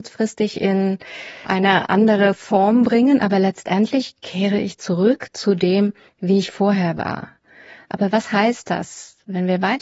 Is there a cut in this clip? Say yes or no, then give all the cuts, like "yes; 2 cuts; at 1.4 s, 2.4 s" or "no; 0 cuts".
no; 0 cuts